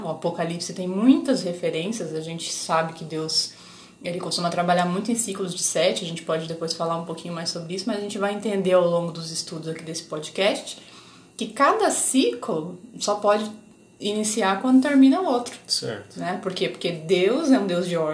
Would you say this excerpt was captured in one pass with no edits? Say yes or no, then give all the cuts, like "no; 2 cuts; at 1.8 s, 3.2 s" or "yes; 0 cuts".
yes; 0 cuts